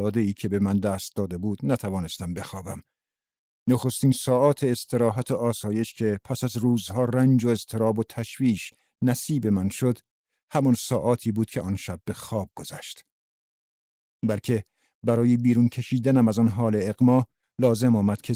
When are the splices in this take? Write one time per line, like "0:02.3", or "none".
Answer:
0:03.5
0:14.1